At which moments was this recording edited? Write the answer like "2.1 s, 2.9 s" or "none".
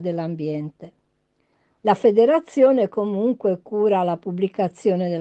1.8 s